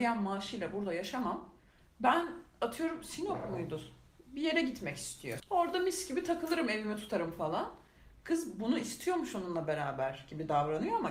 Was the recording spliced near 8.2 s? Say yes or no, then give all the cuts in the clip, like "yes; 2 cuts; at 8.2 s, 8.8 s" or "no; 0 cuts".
no; 1 cut; at 5.4 s